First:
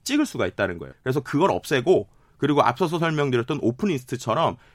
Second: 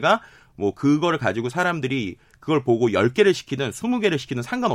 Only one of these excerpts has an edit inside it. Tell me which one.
first; 1 cut; at 0.9 s

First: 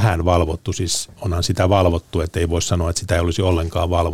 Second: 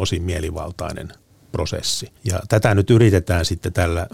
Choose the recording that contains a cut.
second; 1 cut; at 2.2 s

